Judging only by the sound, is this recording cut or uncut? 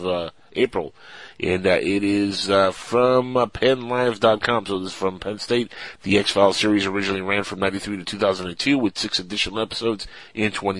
cut